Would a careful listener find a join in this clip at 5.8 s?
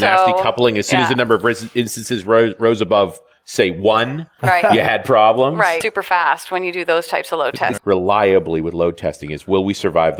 yes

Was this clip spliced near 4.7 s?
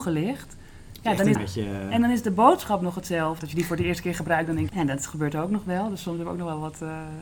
yes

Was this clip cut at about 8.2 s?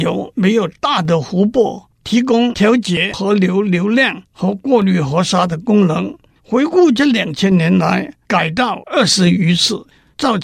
yes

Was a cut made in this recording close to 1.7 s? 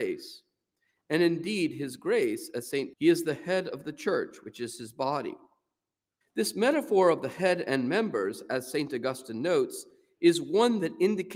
no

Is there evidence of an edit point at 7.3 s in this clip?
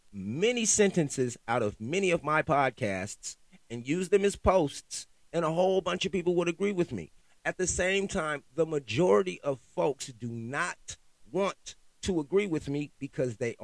no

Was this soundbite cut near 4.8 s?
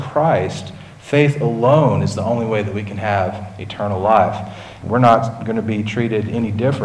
yes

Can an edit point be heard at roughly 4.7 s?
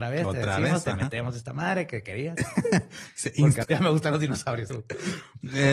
yes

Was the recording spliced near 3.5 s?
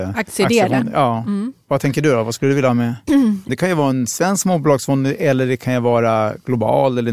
yes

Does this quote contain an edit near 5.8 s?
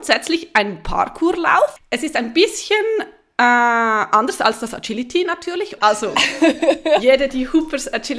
yes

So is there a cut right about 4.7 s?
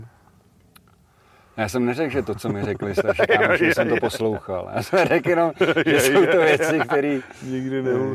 no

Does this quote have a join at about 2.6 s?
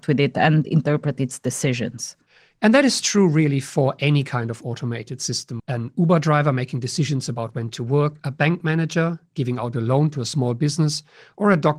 no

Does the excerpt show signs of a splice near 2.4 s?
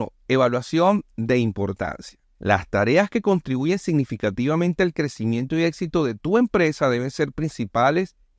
yes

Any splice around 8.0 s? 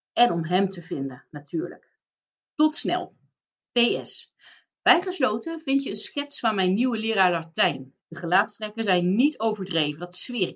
yes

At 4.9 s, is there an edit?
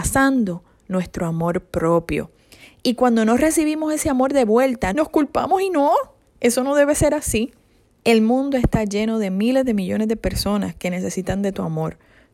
yes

